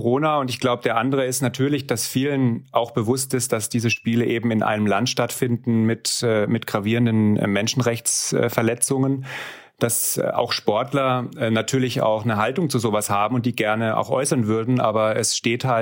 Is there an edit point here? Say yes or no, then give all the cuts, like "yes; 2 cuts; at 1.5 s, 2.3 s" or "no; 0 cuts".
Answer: no; 0 cuts